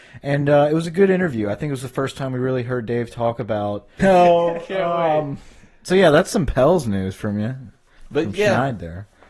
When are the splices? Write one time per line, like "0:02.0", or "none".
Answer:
0:04.0

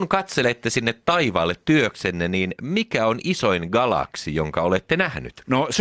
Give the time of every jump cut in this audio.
none

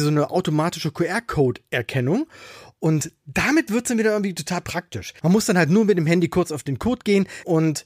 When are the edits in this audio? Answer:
none

